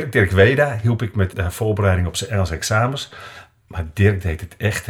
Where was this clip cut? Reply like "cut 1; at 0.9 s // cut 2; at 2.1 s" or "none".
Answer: cut 1; at 1.3 s